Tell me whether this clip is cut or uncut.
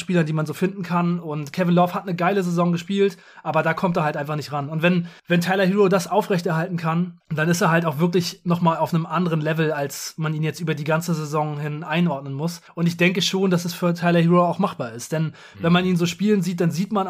uncut